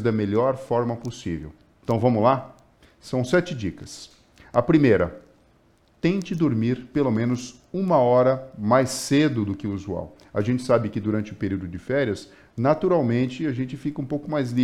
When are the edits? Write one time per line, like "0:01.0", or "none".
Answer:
none

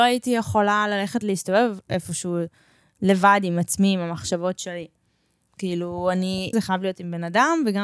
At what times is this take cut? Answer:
0:05.5
0:06.5

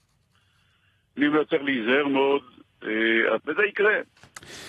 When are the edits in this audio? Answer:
0:01.2
0:03.4

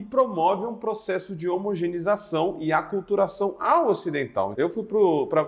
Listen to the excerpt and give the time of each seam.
0:04.5

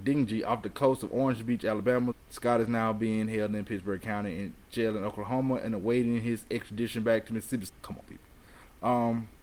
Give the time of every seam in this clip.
0:02.1
0:07.7

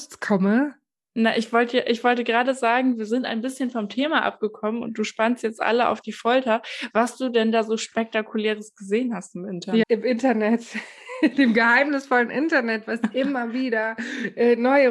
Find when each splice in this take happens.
0:09.8

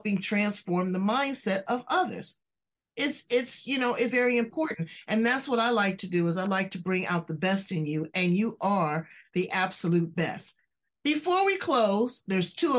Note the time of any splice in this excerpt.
0:04.1

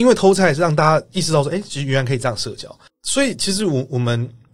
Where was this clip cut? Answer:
none

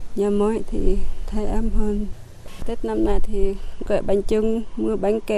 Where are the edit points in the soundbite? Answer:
0:02.6

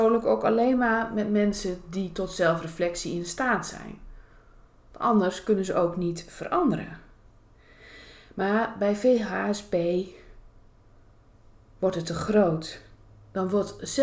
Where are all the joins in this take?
none

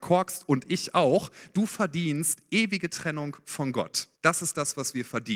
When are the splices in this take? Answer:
0:04.2

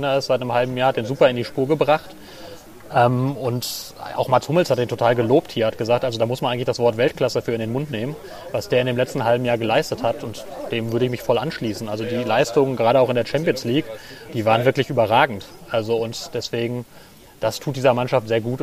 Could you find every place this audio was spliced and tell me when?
0:14.3

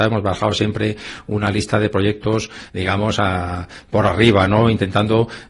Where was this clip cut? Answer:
0:02.7

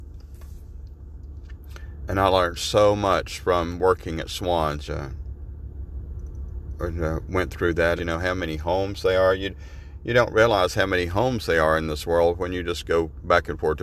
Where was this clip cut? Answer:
0:04.9
0:08.0

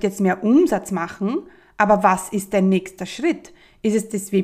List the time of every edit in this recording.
none

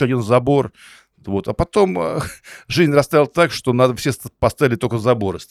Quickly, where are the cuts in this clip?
none

